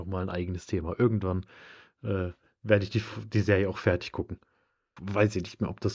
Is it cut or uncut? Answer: cut